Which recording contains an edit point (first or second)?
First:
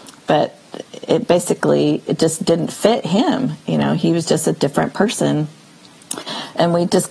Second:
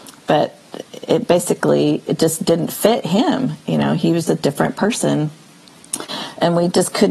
second